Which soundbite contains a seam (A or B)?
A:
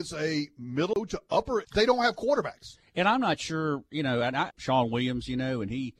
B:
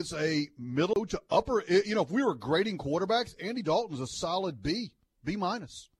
A